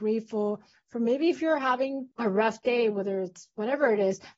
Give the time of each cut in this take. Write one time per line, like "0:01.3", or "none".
0:02.1